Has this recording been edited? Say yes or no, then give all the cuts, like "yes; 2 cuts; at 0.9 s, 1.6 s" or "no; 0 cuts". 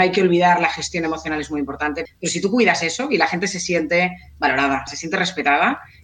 yes; 2 cuts; at 2.1 s, 4.9 s